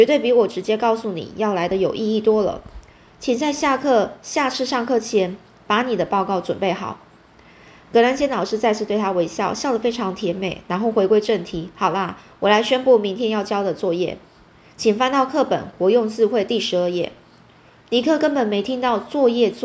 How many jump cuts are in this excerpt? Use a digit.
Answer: 0